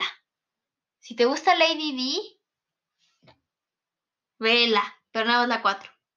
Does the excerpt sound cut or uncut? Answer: uncut